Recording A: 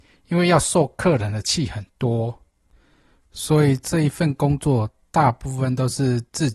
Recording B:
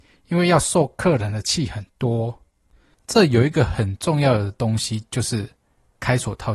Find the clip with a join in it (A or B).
B